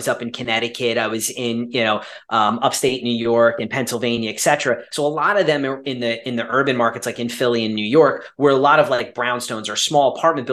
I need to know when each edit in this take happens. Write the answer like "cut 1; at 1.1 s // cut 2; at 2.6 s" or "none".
none